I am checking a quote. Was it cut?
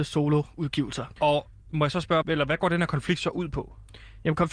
yes; 2 cuts; at 1.2 s, 2.2 s

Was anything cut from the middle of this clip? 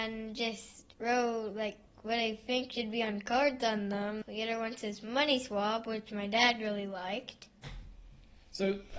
yes; 2 cuts; at 0.9 s, 4.2 s

